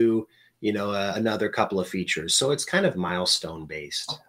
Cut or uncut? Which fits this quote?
uncut